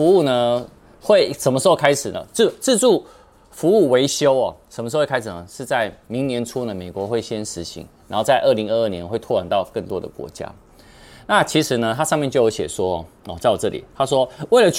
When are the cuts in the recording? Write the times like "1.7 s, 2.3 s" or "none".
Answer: none